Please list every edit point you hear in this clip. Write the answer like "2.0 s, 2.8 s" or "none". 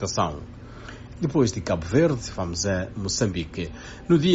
1.2 s